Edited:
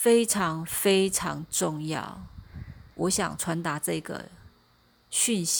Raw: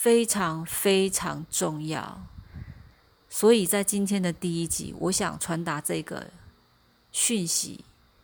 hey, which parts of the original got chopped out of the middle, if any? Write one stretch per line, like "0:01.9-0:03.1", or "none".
0:03.0-0:05.0